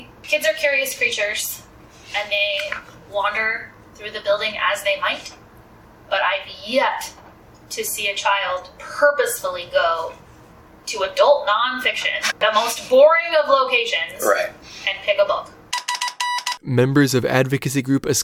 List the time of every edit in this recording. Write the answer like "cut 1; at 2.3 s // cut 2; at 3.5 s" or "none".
none